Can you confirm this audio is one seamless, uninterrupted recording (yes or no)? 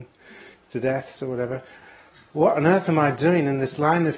yes